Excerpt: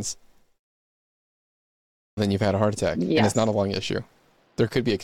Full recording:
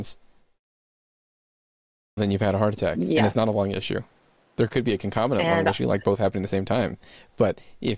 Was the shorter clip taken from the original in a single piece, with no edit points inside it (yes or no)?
yes